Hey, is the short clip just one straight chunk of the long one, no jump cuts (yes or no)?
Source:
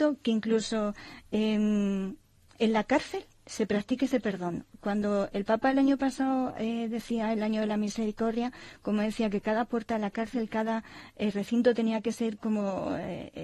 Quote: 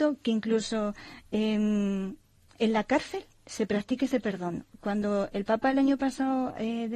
yes